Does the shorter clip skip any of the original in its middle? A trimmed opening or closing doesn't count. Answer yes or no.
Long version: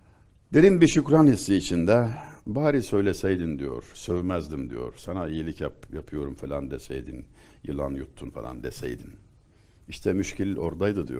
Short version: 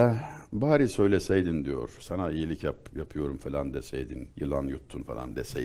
yes